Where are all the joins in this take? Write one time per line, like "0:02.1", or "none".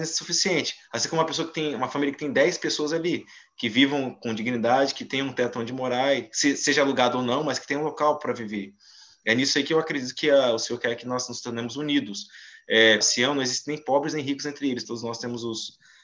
0:13.0
0:14.8